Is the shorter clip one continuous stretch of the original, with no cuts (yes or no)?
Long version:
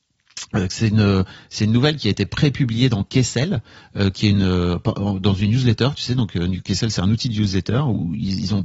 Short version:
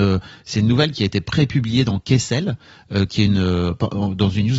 yes